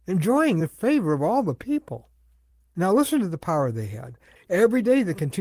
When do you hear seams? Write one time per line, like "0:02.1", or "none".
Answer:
0:04.4